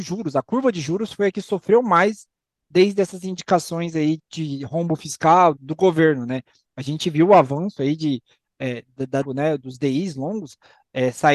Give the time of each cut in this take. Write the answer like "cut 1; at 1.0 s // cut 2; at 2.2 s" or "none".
cut 1; at 4.2 s // cut 2; at 5.6 s // cut 3; at 9.2 s